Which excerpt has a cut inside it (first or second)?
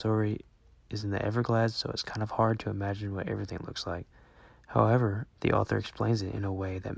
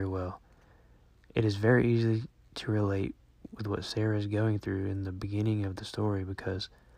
first